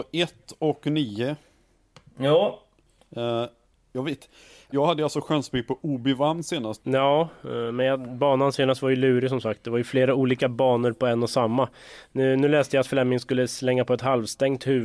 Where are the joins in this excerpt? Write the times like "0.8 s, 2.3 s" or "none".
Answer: 4.7 s, 6.8 s